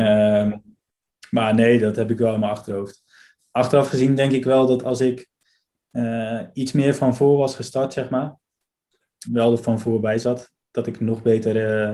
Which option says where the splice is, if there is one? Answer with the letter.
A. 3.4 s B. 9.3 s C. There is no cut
B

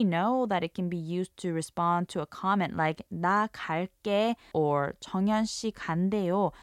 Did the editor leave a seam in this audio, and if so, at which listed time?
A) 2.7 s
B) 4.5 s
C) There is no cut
B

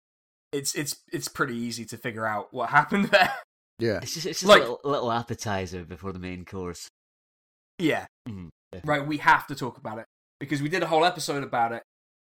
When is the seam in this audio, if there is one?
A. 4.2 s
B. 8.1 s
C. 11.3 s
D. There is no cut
B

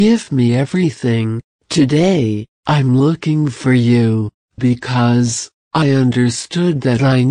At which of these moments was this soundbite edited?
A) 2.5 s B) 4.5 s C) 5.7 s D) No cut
D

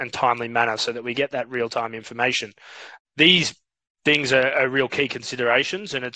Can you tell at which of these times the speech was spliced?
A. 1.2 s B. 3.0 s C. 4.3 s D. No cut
B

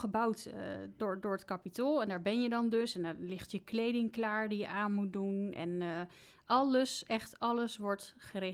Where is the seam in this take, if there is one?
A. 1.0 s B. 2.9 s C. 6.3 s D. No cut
A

